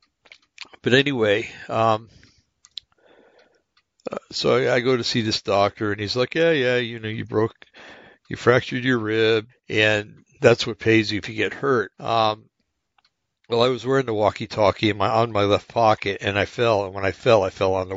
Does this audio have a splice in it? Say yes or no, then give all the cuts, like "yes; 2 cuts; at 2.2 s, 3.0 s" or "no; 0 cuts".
yes; 2 cuts; at 9.5 s, 11.9 s